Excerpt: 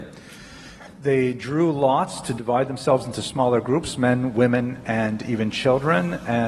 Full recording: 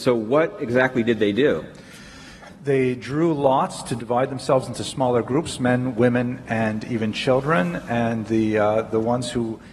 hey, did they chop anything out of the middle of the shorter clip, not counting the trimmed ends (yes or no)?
no